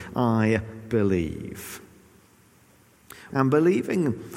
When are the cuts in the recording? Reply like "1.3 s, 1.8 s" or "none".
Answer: 3.3 s